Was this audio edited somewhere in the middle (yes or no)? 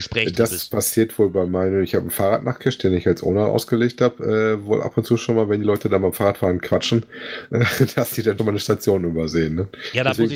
yes